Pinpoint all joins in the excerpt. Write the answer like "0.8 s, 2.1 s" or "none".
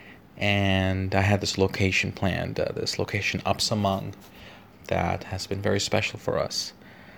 4.7 s